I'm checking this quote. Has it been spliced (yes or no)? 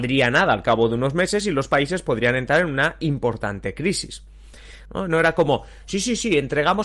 yes